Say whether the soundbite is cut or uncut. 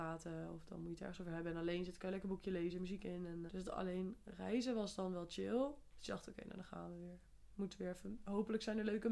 cut